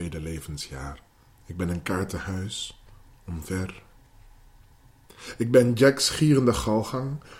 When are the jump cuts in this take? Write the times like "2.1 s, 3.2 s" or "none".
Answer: 1.3 s